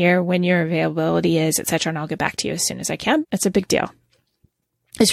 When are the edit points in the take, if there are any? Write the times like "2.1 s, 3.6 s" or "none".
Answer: 3.2 s